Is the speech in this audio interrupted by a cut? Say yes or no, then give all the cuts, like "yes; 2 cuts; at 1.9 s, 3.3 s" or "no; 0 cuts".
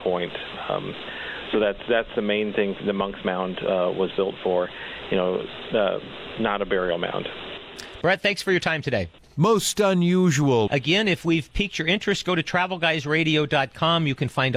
yes; 3 cuts; at 8.0 s, 9.2 s, 10.7 s